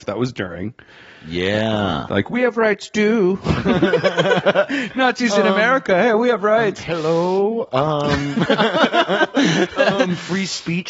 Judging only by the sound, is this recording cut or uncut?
uncut